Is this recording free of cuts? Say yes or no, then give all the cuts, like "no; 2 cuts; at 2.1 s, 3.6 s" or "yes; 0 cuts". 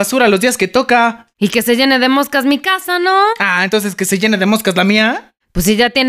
yes; 0 cuts